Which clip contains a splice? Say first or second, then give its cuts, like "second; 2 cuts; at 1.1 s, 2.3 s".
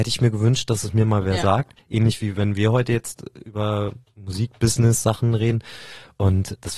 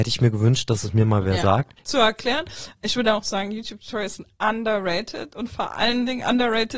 second; 1 cut; at 1.8 s